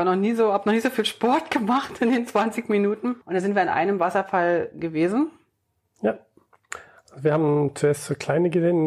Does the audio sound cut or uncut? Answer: cut